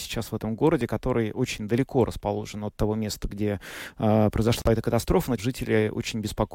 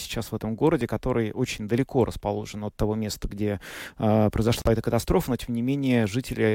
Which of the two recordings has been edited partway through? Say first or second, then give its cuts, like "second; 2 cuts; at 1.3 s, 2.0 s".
first; 1 cut; at 5.4 s